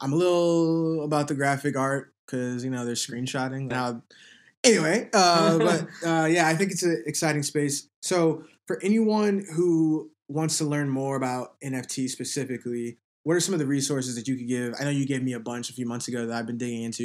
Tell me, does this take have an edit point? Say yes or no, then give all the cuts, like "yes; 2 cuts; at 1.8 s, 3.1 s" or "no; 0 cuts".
yes; 1 cut; at 3.7 s